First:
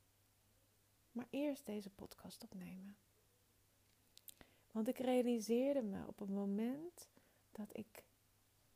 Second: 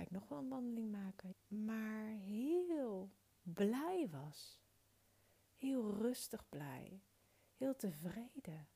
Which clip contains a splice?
second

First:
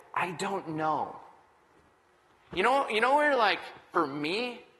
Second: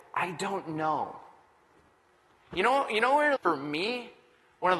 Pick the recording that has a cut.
second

